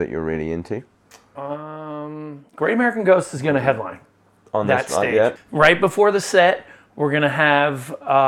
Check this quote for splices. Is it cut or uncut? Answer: cut